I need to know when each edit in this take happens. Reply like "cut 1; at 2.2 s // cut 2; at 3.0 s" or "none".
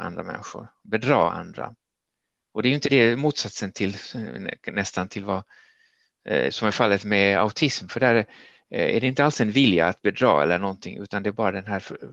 cut 1; at 2.9 s